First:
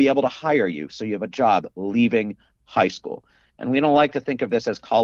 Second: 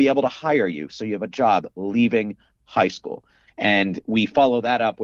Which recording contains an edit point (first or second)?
second